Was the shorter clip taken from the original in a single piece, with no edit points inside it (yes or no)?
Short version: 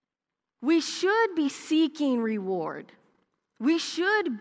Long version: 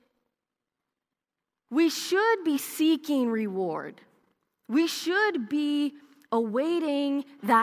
yes